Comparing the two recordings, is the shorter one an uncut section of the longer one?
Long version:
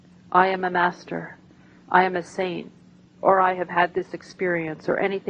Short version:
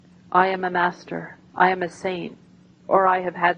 no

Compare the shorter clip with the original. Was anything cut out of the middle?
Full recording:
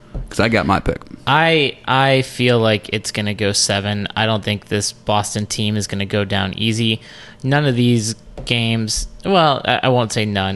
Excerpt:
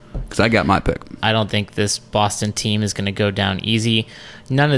yes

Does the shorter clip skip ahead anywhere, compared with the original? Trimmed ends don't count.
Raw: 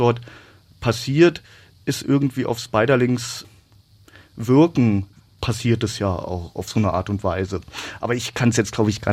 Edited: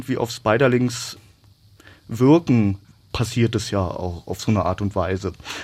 no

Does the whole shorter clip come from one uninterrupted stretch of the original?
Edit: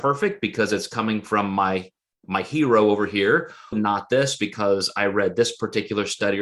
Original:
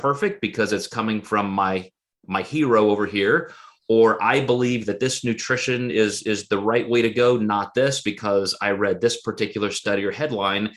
no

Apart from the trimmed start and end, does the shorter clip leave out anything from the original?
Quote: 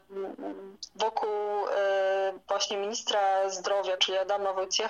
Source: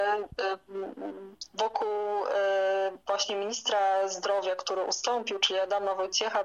yes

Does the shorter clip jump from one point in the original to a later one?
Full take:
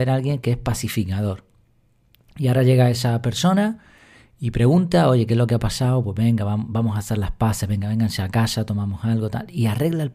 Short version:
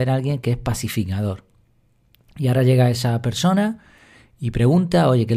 no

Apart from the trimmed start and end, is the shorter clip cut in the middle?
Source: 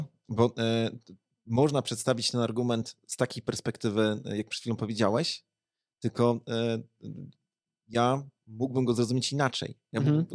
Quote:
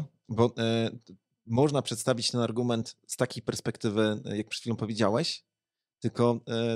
no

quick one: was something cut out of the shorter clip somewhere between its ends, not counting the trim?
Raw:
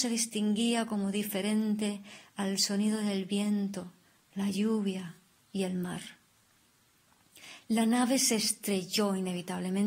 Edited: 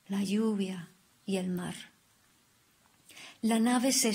no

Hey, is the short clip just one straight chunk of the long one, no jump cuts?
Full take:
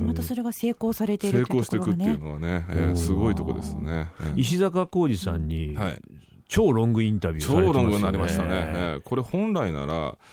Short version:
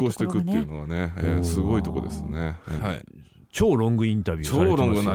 no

